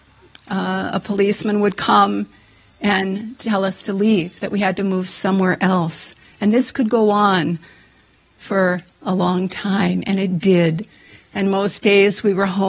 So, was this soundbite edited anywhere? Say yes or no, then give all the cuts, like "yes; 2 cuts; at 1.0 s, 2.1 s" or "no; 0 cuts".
no; 0 cuts